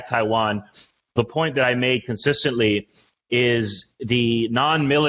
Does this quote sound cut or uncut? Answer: uncut